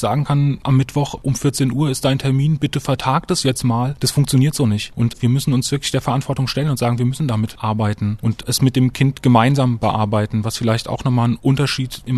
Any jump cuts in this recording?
no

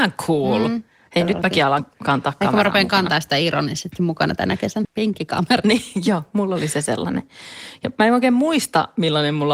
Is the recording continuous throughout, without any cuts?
no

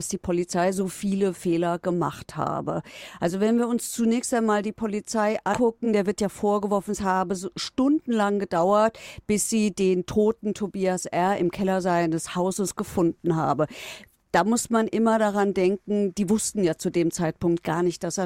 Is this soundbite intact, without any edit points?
yes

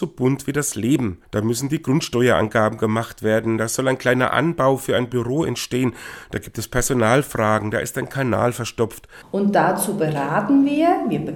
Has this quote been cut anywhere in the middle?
yes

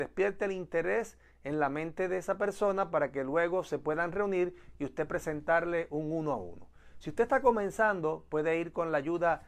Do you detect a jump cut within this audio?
no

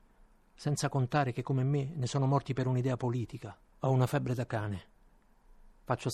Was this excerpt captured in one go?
no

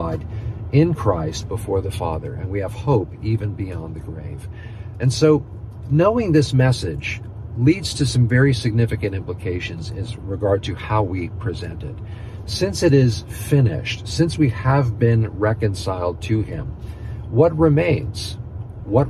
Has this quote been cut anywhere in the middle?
no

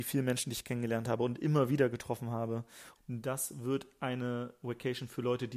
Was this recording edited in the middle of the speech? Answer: yes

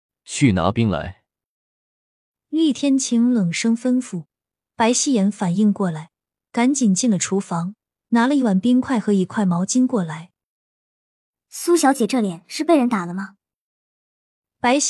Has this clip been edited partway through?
no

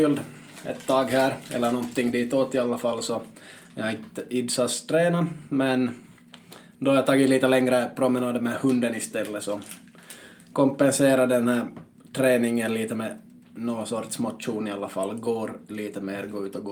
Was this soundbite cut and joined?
no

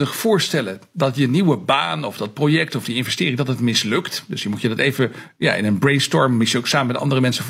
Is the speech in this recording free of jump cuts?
yes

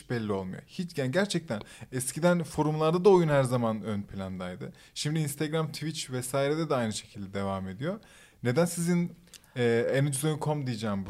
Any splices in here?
no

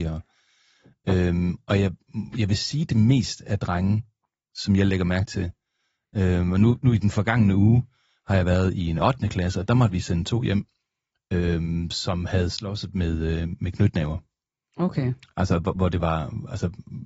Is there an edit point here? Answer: no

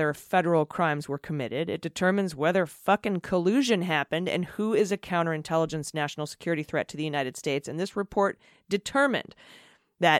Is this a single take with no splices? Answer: yes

